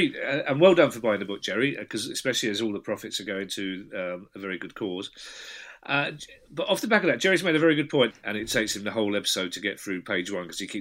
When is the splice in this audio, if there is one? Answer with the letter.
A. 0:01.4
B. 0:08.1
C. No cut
B